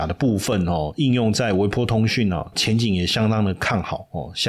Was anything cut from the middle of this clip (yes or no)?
yes